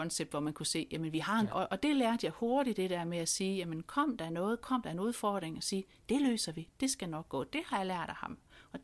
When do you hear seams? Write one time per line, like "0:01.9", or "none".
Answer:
0:01.5